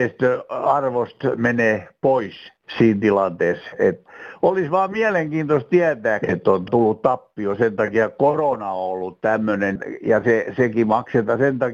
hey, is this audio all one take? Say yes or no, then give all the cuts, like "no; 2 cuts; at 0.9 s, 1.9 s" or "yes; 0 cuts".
no; 1 cut; at 6.2 s